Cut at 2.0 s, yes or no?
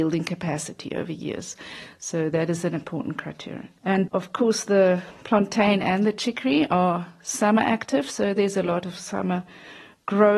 no